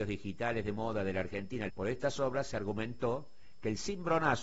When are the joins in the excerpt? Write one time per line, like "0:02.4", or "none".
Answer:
0:01.7